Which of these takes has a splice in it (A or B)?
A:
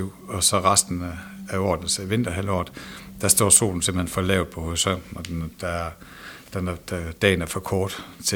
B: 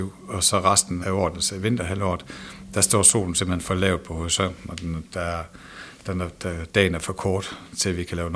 B